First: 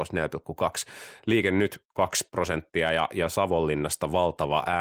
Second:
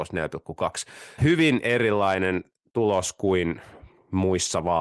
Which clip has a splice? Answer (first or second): second